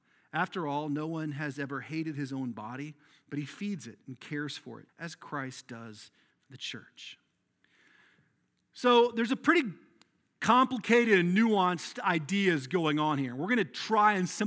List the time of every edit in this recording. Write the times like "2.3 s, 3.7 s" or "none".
4.9 s